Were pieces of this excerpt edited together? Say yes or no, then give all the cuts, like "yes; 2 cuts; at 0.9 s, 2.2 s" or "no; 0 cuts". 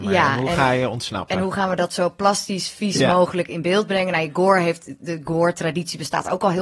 no; 0 cuts